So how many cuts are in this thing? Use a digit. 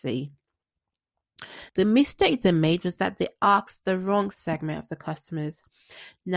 1